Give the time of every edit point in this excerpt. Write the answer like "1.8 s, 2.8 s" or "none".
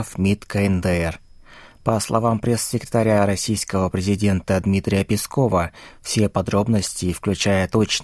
none